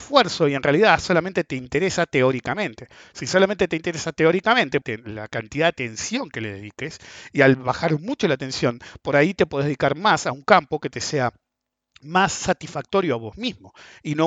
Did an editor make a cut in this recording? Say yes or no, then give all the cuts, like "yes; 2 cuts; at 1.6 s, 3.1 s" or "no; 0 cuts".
yes; 1 cut; at 4.8 s